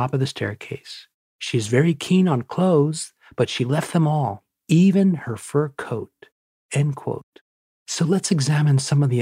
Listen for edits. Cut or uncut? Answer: cut